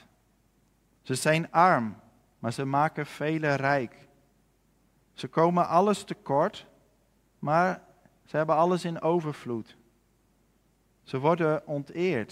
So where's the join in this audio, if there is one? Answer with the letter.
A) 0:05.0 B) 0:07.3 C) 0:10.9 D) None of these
D